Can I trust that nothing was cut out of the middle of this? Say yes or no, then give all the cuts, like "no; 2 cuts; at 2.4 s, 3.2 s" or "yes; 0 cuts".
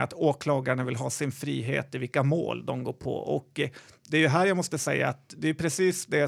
yes; 0 cuts